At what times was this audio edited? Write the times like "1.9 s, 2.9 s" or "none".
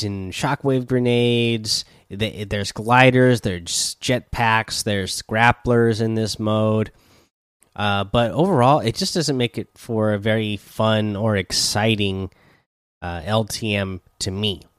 none